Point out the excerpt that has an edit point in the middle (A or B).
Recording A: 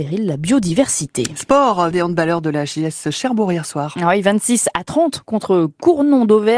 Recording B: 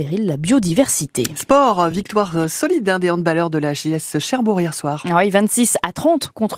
A